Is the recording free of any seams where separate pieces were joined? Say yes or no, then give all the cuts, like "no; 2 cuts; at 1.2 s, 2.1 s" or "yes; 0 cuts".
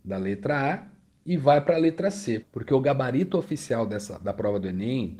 no; 1 cut; at 2.4 s